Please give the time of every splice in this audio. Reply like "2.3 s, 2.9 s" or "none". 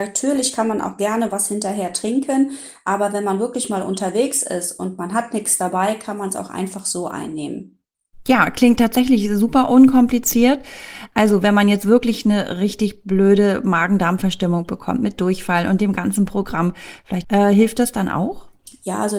11.1 s, 17.2 s